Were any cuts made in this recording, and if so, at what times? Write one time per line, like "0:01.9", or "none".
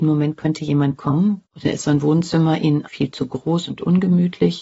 0:01.4
0:02.9